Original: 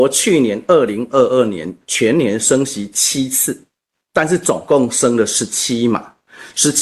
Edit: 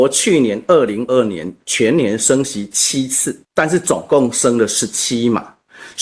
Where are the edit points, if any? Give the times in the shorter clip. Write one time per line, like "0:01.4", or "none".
0:01.1
0:03.4